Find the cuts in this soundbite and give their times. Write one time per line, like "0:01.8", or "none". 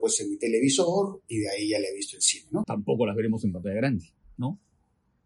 0:02.6